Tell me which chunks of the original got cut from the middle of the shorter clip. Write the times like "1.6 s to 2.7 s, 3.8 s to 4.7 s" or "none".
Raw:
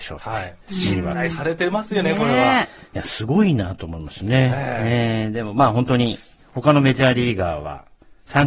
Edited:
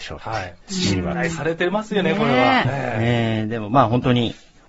2.6 s to 4.5 s

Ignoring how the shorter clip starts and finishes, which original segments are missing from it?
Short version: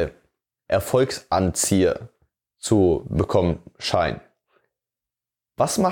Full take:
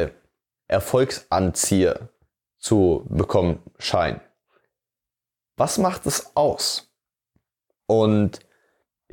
none

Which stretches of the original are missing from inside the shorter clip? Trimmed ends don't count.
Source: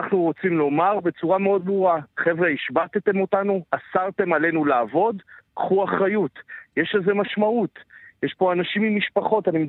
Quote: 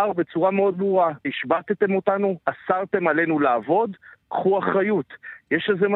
2.1 s to 2.5 s

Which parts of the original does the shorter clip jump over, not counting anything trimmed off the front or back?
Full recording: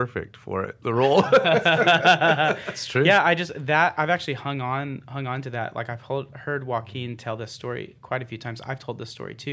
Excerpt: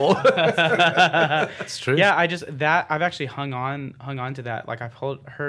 none

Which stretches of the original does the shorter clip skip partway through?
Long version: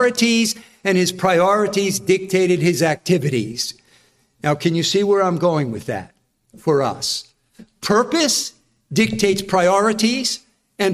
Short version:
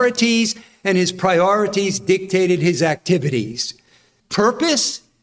4.2 s to 7.7 s

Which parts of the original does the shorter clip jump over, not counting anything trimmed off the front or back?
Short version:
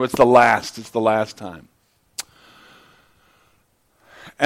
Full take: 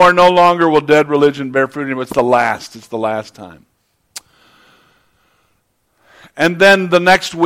none

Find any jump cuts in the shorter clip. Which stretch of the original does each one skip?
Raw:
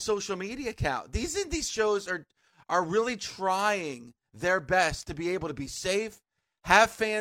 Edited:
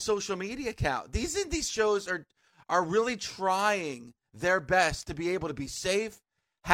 none

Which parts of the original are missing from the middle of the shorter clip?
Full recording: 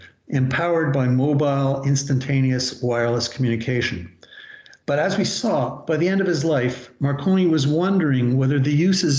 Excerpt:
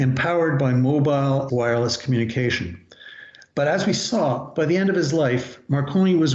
1.8 s to 2.8 s

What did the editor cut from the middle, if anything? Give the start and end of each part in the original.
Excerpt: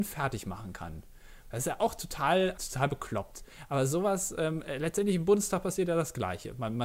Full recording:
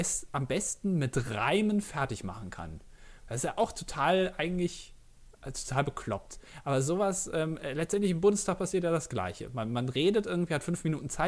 4.3 s to 5.5 s

